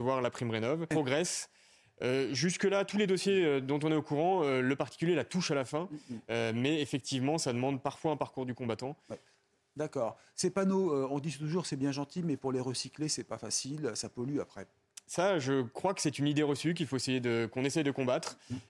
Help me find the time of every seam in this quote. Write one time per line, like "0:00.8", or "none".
0:00.9